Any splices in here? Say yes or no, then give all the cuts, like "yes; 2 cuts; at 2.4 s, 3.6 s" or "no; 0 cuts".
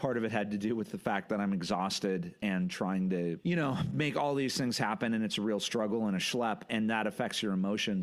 no; 0 cuts